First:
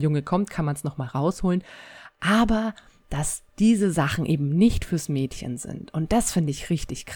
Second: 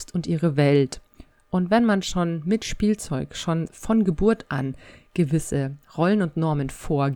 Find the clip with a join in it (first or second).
second